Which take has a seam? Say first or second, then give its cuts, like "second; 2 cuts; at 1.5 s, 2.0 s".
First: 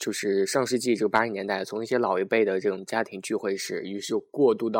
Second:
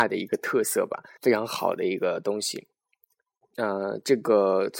second; 1 cut; at 1.2 s